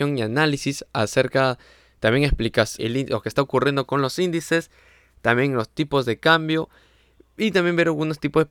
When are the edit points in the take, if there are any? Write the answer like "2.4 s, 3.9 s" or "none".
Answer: 2.8 s